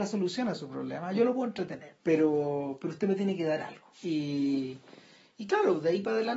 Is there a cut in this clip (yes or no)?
yes